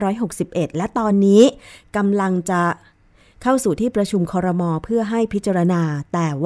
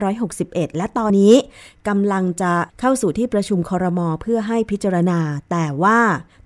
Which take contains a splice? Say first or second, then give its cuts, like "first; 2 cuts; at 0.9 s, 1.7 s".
second; 2 cuts; at 1.1 s, 2.7 s